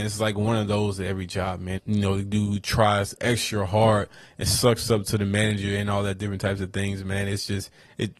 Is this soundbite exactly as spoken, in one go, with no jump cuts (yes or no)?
no